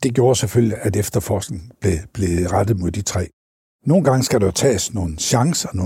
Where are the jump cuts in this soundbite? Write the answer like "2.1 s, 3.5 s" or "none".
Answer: none